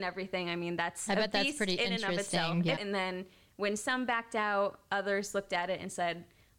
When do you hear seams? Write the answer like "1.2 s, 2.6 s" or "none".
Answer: 2.8 s